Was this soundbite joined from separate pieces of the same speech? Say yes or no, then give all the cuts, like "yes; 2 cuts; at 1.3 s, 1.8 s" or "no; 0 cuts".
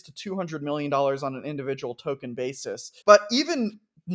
yes; 1 cut; at 3.0 s